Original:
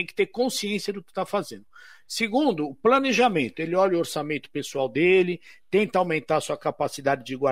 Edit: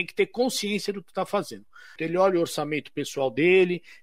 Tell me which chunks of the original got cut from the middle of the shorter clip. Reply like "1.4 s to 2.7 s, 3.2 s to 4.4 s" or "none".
2.0 s to 3.5 s